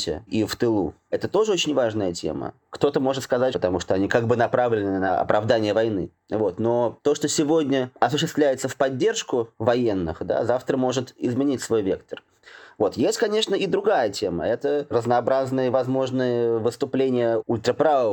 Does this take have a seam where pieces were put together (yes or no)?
yes